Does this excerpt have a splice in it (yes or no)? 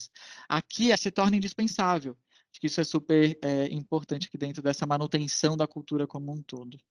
yes